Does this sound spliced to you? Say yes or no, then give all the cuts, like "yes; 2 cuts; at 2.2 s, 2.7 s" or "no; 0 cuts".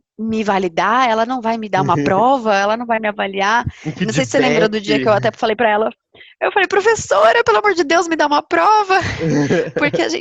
no; 0 cuts